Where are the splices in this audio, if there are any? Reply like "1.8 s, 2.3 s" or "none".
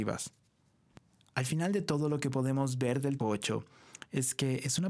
3.2 s